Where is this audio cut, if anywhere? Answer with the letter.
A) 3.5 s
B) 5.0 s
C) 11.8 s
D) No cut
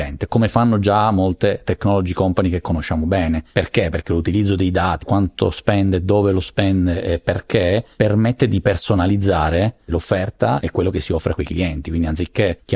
B